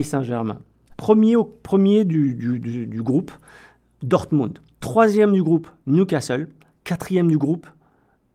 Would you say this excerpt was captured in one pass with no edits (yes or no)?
no